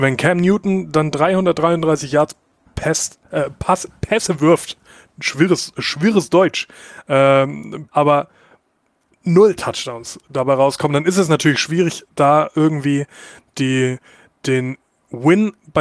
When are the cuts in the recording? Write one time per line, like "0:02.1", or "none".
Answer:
0:07.9